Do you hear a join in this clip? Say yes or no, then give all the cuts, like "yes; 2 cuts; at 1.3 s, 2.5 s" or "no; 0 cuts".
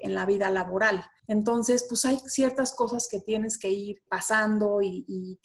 no; 0 cuts